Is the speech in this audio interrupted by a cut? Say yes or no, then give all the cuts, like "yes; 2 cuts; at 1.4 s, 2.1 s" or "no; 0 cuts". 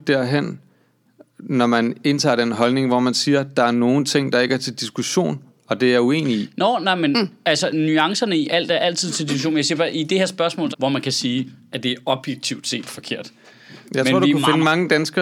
yes; 2 cuts; at 10.7 s, 13.8 s